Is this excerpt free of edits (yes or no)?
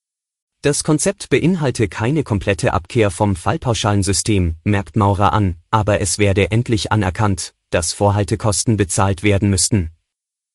yes